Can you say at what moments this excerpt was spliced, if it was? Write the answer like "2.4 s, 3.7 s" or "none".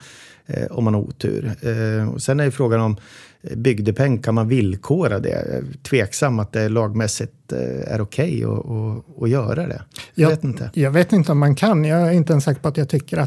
none